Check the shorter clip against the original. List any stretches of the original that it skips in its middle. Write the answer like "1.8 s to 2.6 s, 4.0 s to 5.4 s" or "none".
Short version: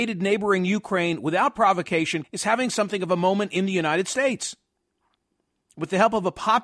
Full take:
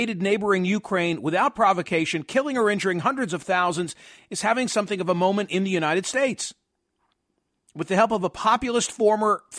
2.2 s to 4.2 s

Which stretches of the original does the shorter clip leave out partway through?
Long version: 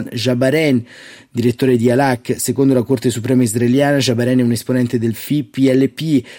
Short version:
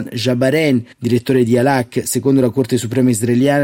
0.9 s to 1.3 s

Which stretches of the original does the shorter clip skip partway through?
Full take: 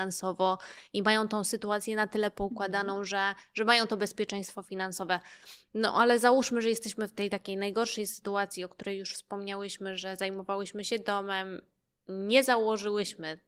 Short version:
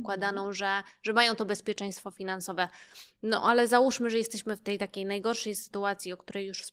none

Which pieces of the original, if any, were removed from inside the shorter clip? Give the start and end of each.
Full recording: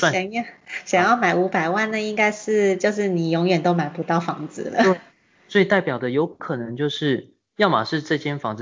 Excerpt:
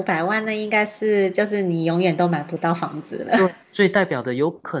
5.1 s to 5.4 s

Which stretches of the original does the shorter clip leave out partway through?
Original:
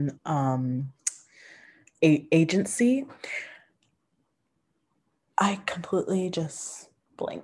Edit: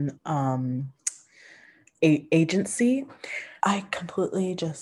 3.6 s to 5.3 s

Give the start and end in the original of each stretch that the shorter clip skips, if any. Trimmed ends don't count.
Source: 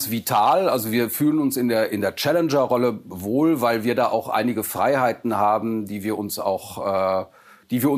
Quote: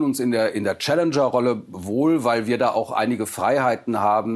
none

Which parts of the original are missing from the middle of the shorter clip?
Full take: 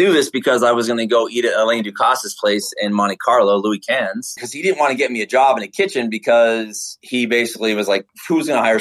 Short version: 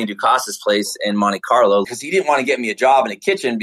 3.6 s to 4.4 s

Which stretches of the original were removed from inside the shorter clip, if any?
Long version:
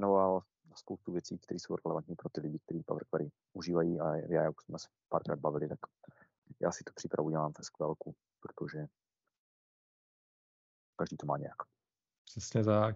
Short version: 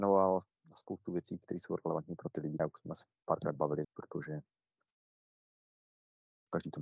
2.6 s to 4.4 s, 5.7 s to 8.3 s

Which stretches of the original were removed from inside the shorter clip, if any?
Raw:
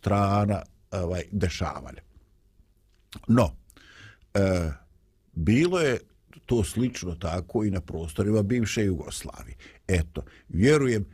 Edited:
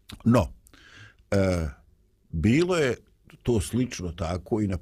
none

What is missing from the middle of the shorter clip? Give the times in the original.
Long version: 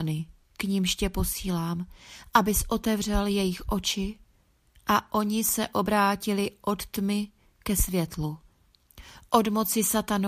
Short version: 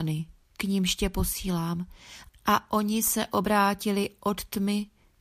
2.3 s to 4.7 s

